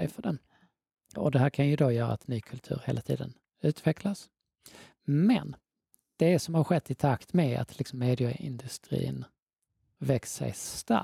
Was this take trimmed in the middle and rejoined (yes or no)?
yes